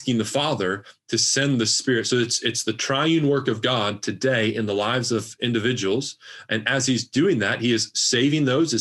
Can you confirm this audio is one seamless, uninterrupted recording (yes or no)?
yes